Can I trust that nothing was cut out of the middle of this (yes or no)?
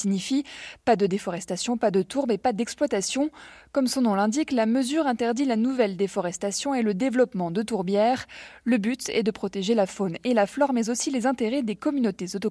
yes